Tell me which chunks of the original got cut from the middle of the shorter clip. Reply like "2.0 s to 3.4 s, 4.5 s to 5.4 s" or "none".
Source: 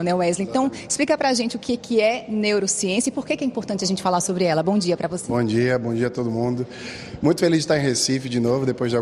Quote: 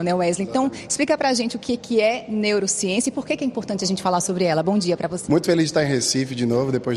5.3 s to 7.2 s